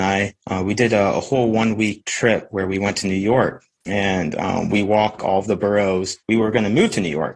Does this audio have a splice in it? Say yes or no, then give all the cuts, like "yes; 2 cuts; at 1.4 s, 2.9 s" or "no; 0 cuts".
yes; 1 cut; at 5.2 s